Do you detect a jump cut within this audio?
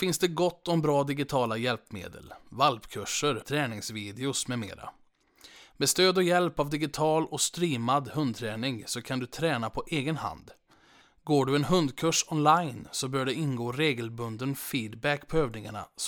yes; 1 cut; at 3.4 s

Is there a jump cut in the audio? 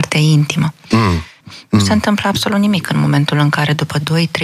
yes; 1 cut; at 1.4 s

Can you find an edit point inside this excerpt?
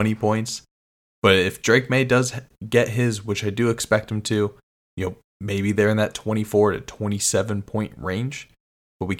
no; 0 cuts

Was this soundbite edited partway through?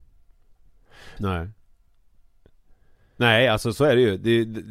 yes; 1 cut; at 1.2 s

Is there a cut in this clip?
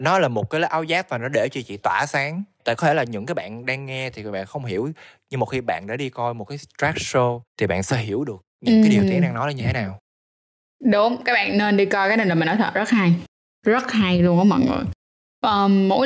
yes; 1 cut; at 7.5 s

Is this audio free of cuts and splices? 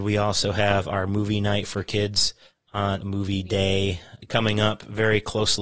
no; 2 cuts; at 3.0 s, 4.2 s

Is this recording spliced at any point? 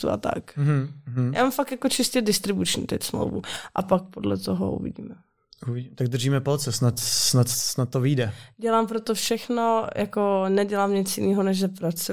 no; 0 cuts

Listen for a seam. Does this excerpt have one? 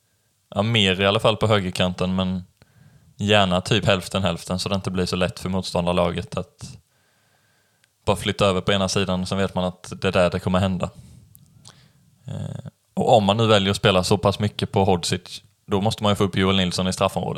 no; 0 cuts

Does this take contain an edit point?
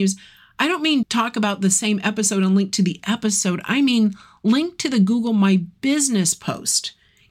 yes; 1 cut; at 1.0 s

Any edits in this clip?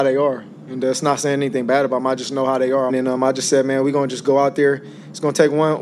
yes; 1 cut; at 2.9 s

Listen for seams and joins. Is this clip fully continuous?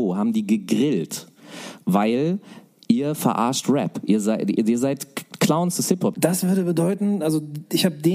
no; 1 cut; at 6.1 s

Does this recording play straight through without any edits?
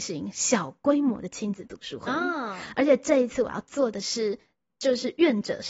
yes; 0 cuts

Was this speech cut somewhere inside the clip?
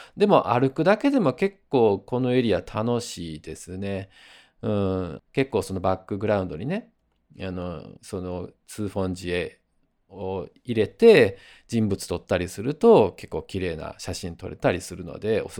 yes; 2 cuts; at 5.2 s, 8.0 s

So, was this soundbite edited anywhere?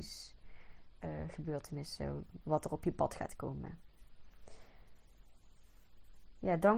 yes; 1 cut; at 2.4 s

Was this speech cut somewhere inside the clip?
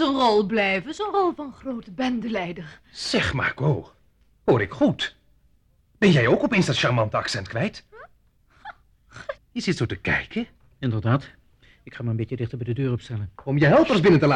yes; 1 cut; at 9.4 s

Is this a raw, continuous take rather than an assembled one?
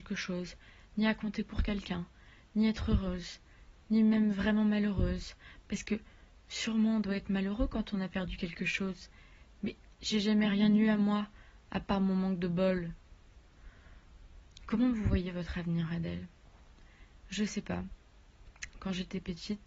yes; 0 cuts

